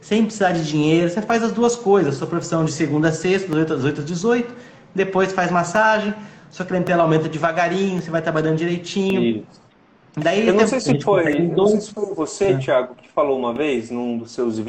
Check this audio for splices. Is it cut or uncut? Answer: uncut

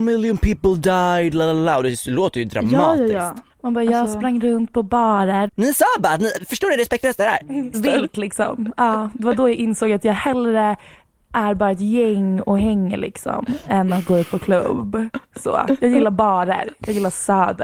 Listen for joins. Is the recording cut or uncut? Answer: cut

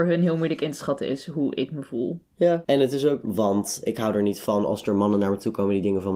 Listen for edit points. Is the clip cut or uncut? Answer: cut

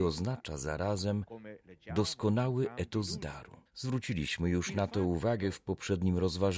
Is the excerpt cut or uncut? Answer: cut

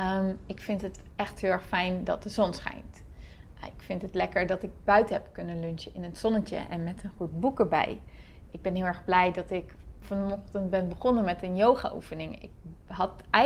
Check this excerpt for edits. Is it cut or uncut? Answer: uncut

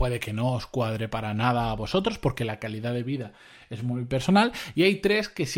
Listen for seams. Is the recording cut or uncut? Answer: uncut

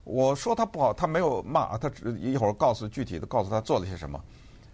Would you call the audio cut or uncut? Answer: uncut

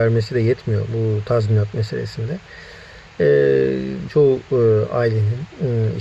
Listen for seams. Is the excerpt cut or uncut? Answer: cut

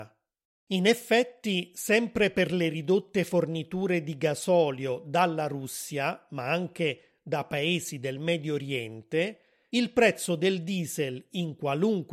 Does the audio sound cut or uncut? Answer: uncut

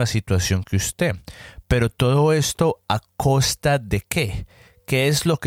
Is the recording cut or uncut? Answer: uncut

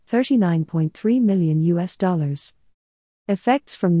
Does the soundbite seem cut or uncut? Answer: cut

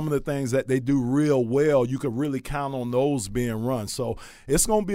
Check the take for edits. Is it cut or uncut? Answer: uncut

